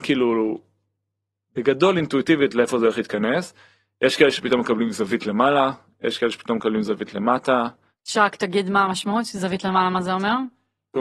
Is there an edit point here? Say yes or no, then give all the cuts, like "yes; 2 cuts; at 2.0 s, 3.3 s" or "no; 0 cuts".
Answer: no; 0 cuts